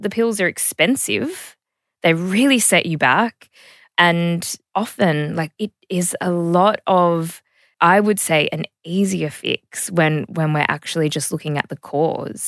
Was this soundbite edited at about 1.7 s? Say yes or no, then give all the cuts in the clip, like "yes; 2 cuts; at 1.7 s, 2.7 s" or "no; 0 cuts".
no; 0 cuts